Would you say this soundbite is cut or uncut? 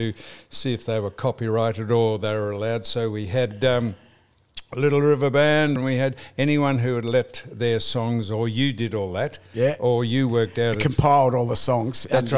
cut